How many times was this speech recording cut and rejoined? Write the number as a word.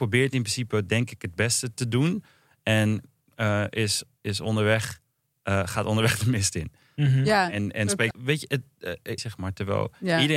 two